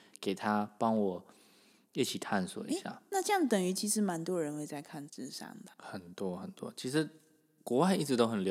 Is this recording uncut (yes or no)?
no